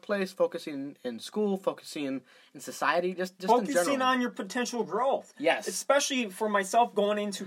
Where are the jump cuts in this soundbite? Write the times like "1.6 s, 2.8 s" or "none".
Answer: none